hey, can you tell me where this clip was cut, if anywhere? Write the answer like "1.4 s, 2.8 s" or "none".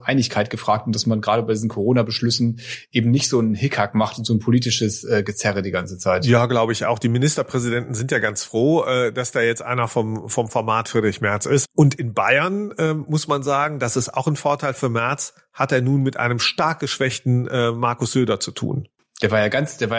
11.6 s